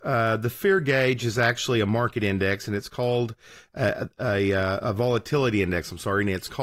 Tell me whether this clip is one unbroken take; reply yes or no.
yes